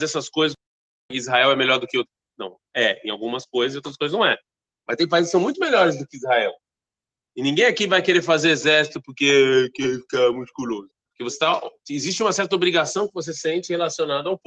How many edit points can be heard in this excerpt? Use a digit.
1